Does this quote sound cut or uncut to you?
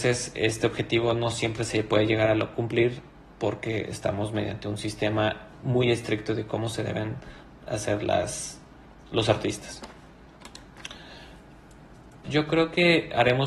cut